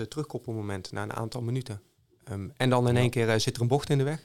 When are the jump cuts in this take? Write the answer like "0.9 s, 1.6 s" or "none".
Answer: 2.5 s